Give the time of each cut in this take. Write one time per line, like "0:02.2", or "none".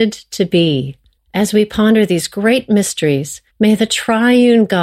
0:01.2
0:03.5